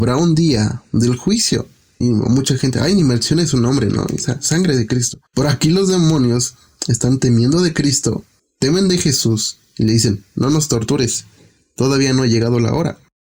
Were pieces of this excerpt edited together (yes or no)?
yes